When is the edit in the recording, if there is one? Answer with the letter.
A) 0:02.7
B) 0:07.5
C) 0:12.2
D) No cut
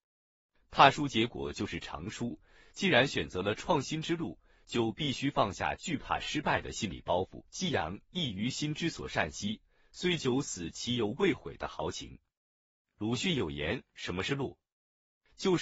B